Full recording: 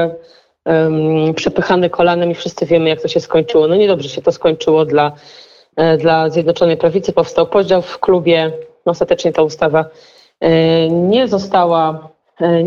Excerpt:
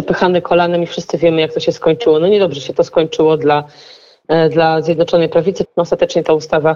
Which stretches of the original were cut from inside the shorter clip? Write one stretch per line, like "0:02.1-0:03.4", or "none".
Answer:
0:07.1-0:08.7